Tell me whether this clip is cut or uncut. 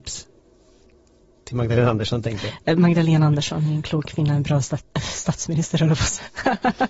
uncut